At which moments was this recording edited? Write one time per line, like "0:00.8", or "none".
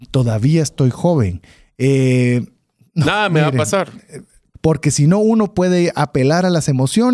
0:04.5